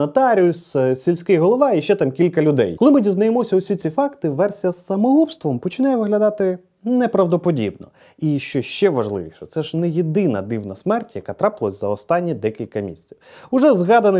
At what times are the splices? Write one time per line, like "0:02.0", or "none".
none